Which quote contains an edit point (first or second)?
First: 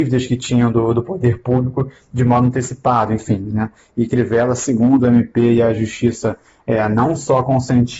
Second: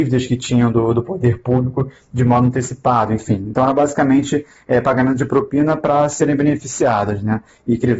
first